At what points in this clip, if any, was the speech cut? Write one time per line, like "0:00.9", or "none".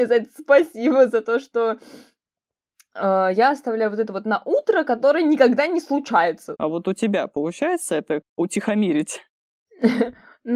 0:06.6
0:08.2